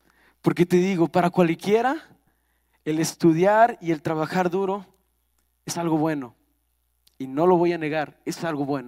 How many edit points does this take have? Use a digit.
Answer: 0